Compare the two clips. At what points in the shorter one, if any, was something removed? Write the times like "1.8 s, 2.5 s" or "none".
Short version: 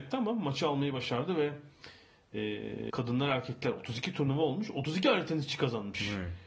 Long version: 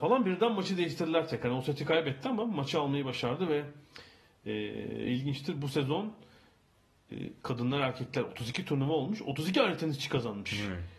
2.9 s

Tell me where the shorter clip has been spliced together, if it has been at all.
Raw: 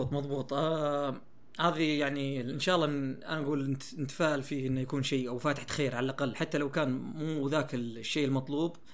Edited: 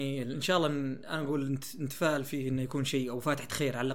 none

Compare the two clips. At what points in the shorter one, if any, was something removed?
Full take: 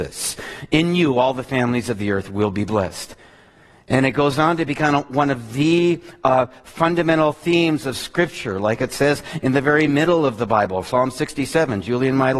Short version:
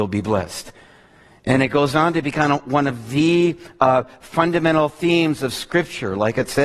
none

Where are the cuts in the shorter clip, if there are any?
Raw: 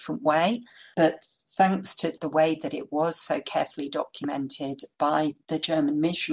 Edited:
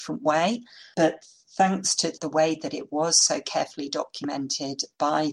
none

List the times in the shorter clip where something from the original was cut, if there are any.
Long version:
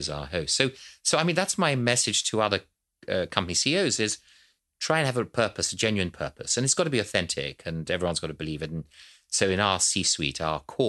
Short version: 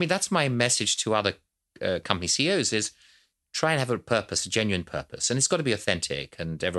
none

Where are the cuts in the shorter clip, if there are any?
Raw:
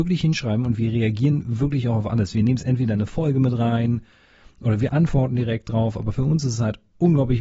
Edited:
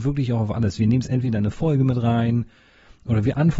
none

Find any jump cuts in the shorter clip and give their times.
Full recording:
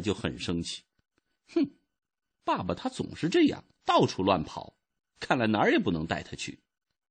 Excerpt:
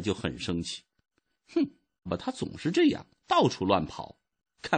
2.1 s

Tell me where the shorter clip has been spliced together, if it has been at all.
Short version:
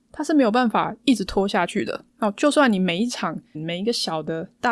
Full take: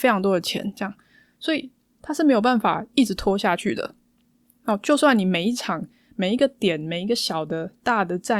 2.1 s, 3.5 s

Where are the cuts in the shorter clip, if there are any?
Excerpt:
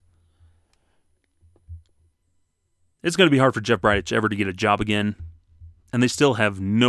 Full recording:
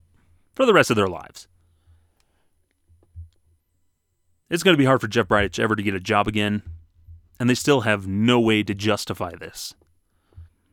none

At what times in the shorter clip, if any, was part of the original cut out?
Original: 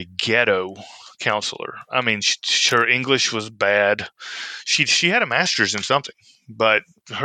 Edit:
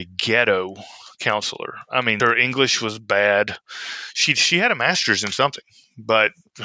2.2 s

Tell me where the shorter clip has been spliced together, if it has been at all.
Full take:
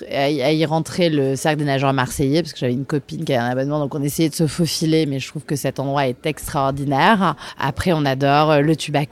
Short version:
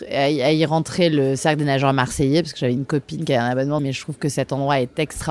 3.8 s

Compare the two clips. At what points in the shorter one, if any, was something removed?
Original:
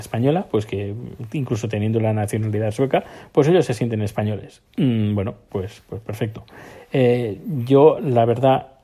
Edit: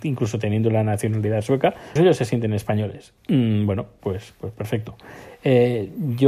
2.0 s

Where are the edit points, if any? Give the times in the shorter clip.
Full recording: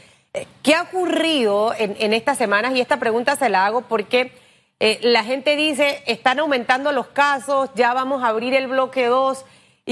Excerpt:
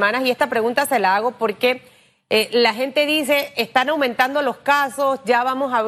none

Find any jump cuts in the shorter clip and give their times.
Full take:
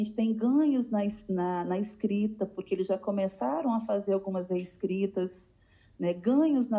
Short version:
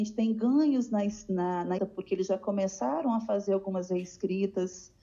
1.8 s

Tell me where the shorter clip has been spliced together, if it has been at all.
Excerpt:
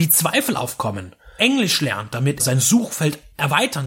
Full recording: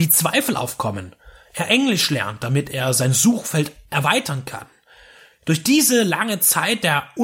1.4 s, 2.4 s

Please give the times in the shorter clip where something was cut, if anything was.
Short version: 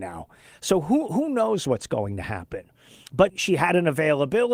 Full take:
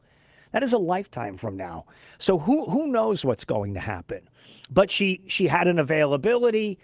3.3 s

